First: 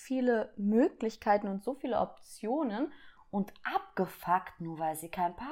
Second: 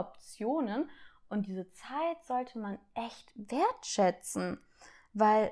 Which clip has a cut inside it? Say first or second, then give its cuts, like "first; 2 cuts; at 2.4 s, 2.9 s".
first; 1 cut; at 3.2 s